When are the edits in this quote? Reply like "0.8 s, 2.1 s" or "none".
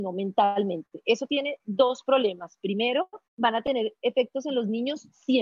3.3 s